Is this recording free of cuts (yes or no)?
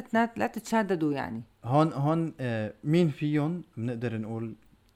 yes